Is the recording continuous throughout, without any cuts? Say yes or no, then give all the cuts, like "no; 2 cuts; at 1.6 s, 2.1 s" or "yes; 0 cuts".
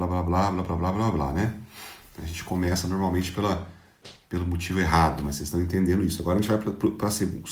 yes; 0 cuts